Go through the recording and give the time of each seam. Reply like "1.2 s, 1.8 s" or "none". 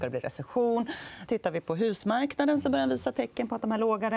1.3 s

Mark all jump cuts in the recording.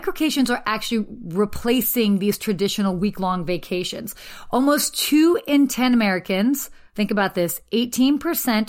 6.9 s

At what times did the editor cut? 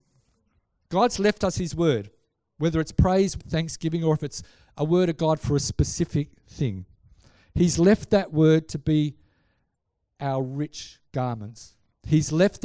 3.4 s

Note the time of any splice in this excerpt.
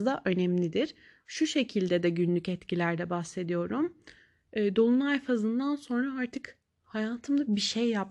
none

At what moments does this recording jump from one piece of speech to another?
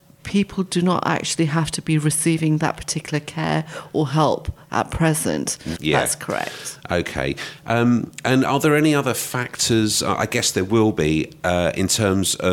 5.8 s

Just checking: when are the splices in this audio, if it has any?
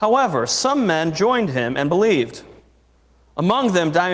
none

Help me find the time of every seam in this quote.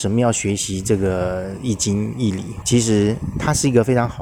2.6 s

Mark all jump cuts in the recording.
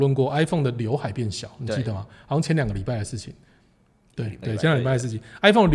4.4 s

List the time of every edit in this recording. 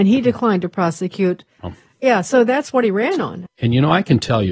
1.6 s, 3.5 s

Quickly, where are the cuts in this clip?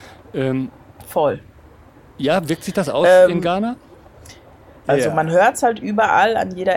4.8 s

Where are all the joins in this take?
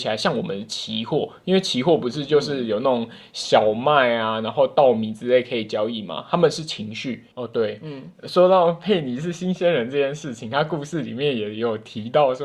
7.3 s

